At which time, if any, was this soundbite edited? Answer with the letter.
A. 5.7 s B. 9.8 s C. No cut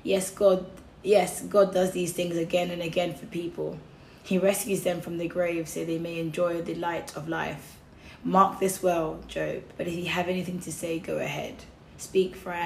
B